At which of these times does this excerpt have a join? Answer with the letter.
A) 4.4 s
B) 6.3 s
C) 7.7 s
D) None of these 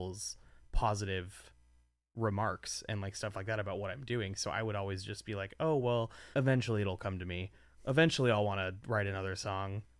B